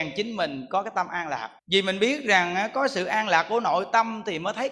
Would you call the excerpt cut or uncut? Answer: cut